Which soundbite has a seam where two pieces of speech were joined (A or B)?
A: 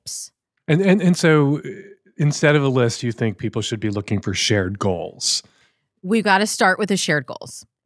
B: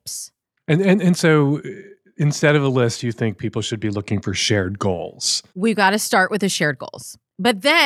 B